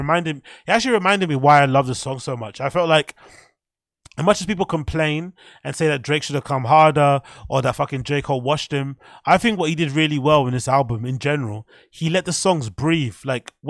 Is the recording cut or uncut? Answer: uncut